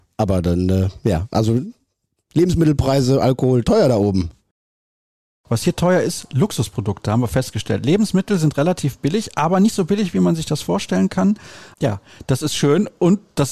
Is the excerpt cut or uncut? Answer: cut